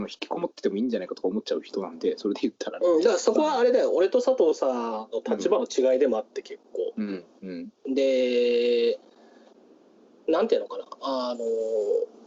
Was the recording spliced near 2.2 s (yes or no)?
no